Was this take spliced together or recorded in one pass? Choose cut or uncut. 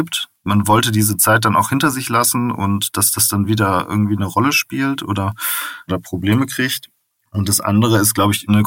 uncut